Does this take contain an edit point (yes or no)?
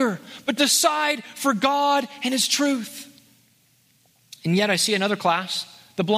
no